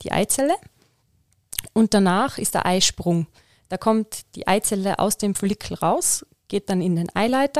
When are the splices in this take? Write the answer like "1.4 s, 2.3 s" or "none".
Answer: none